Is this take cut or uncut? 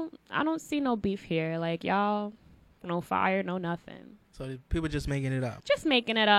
cut